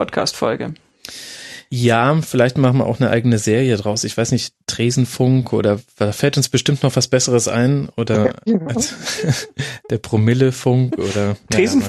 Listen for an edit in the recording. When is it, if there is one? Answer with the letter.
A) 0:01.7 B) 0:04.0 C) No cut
C